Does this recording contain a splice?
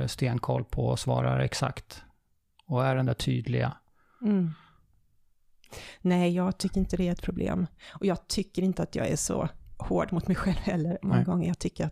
no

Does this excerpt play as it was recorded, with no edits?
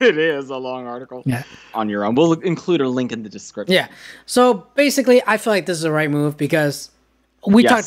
no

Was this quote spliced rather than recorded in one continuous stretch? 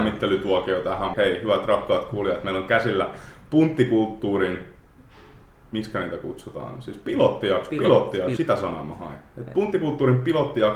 yes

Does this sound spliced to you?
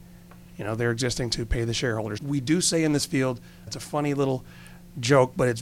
yes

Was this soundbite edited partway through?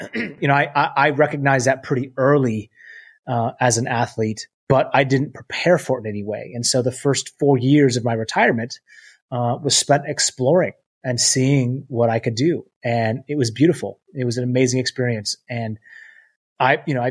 no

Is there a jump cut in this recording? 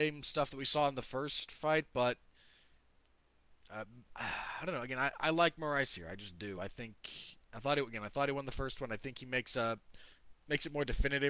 no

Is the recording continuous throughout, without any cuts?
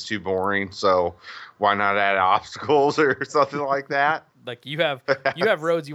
no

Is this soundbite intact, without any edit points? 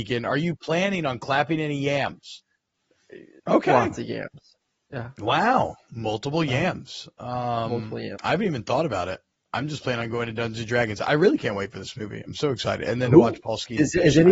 no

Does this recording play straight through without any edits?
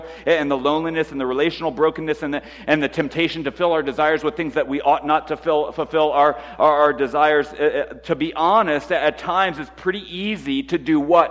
yes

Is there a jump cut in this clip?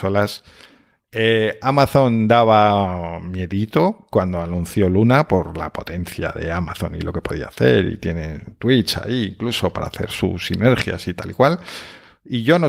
no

